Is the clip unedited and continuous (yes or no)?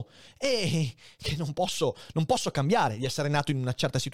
yes